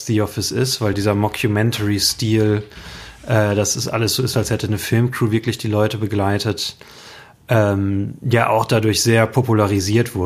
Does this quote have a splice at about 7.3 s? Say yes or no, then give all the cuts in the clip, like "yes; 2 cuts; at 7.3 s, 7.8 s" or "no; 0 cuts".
no; 1 cut; at 0.9 s